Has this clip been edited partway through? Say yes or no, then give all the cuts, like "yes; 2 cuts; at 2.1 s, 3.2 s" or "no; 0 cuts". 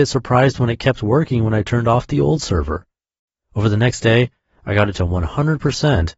no; 0 cuts